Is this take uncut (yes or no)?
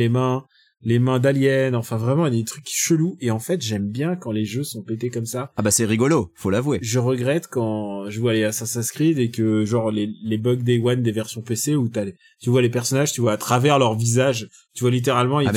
yes